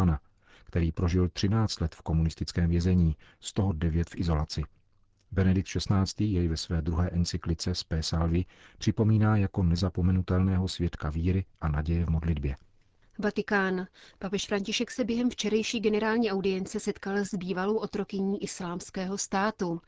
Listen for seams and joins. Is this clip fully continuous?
yes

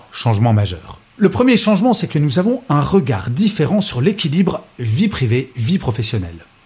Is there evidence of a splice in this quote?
no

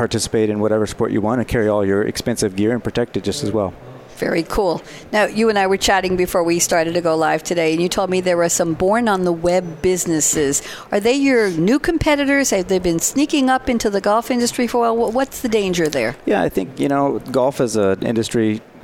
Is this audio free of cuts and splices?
yes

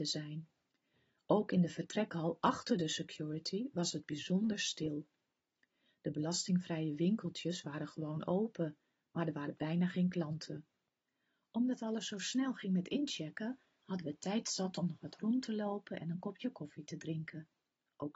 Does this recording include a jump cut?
no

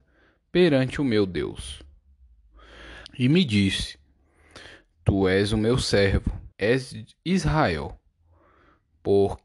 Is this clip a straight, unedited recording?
no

